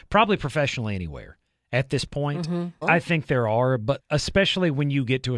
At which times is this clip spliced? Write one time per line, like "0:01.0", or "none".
0:02.8
0:04.0